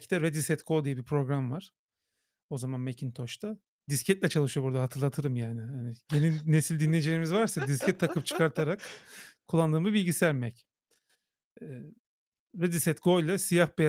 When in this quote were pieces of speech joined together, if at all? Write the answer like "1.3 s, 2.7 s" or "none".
none